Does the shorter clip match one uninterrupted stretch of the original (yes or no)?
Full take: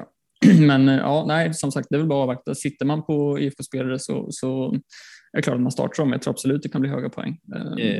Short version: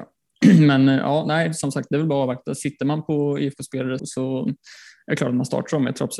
no